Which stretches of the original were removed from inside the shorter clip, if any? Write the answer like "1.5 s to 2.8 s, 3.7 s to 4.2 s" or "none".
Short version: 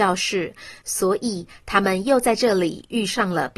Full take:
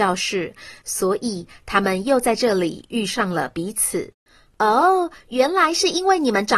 none